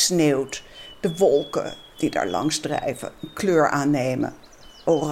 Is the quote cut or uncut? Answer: uncut